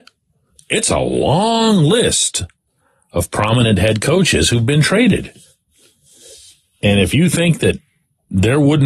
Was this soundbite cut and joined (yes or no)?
no